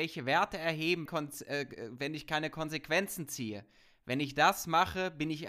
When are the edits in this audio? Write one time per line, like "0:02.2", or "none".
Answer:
0:01.1